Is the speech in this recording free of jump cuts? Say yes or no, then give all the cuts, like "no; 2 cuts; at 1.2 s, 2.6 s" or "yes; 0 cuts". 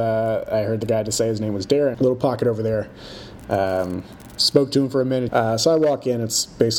no; 3 cuts; at 1.9 s, 3.4 s, 5.3 s